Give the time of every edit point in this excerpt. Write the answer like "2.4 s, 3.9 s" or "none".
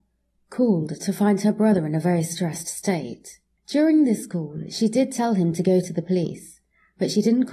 3.6 s

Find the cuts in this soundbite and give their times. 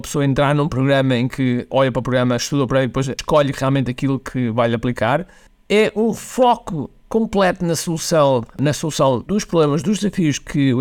none

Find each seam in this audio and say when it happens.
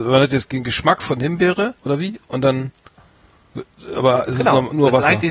1.8 s

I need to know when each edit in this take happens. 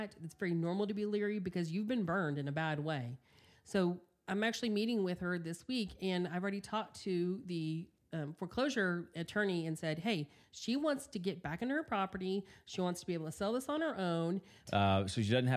14.7 s

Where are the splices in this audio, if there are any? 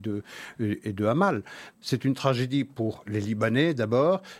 1.7 s

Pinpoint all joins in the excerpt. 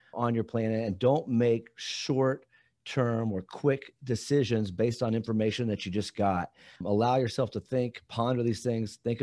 none

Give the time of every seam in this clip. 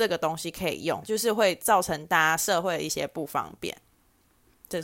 1.0 s

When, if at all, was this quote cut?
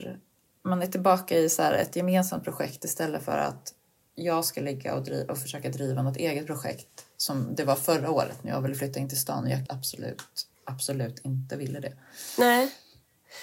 9.7 s

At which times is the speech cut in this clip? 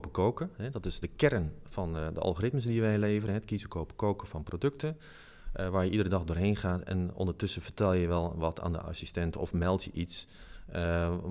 none

